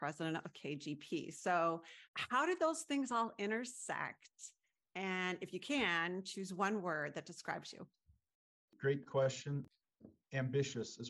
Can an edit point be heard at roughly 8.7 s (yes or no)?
no